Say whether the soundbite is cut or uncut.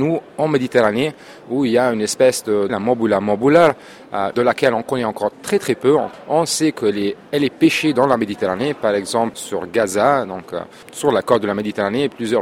cut